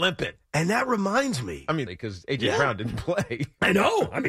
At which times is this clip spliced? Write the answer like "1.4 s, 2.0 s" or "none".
1.9 s